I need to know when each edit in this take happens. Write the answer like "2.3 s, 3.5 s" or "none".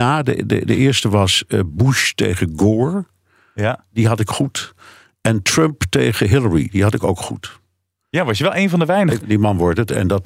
9.2 s